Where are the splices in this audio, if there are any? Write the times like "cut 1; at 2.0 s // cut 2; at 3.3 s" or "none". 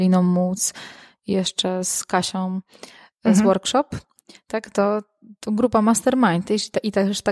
none